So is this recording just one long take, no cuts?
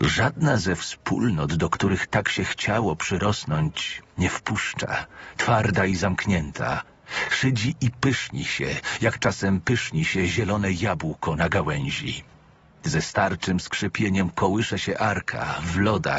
yes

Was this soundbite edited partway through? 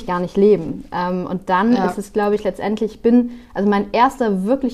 no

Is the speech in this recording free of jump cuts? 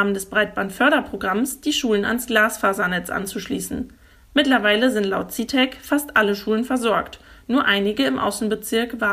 yes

